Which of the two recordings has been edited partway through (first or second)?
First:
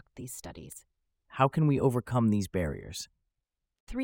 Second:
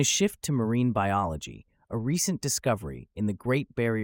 first